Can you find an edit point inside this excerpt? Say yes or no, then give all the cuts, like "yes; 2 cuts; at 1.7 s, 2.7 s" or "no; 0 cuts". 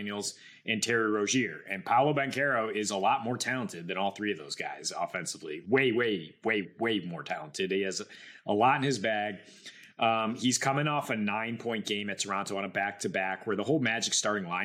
yes; 1 cut; at 5.6 s